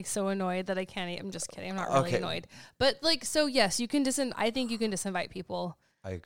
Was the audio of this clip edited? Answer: no; 0 cuts

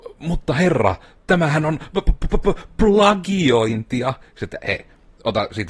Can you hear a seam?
no; 0 cuts

